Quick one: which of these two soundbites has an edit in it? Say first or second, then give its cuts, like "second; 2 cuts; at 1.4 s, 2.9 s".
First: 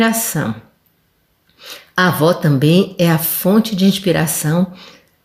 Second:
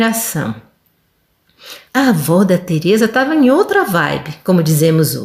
second; 1 cut; at 1.9 s